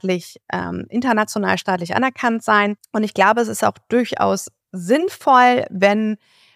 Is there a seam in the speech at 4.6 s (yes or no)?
yes